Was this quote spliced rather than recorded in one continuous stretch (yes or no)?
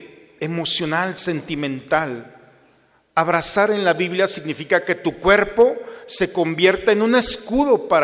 no